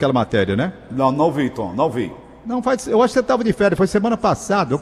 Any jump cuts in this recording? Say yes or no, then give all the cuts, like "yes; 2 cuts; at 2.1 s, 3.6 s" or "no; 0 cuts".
no; 0 cuts